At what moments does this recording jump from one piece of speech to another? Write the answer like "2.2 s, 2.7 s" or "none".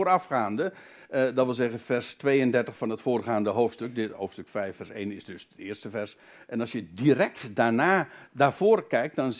none